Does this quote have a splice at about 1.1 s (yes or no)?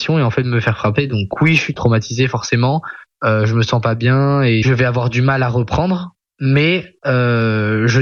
no